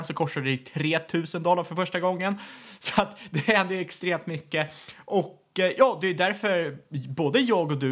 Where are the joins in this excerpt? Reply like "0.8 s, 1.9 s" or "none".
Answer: none